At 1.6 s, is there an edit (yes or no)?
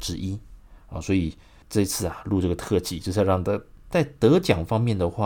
yes